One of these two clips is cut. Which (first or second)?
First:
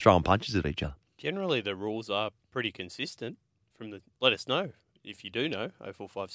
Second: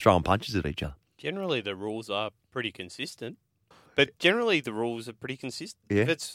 second